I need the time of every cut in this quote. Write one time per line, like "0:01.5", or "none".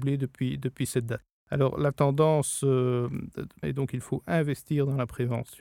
0:03.6